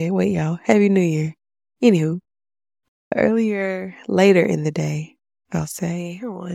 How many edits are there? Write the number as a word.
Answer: zero